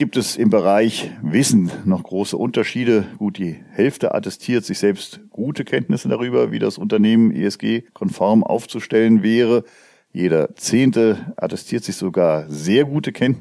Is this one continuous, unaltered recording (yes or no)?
yes